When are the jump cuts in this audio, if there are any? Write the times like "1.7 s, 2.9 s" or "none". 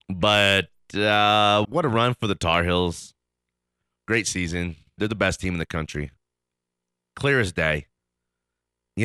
1.6 s, 5.0 s